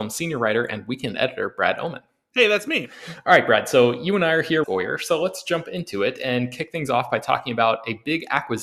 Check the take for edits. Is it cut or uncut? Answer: cut